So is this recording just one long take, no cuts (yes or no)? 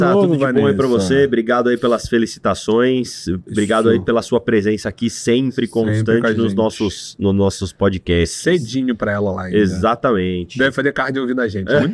yes